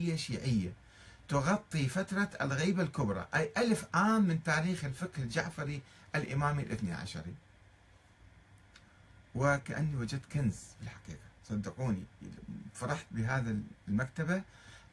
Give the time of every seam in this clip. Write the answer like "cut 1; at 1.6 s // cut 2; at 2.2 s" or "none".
none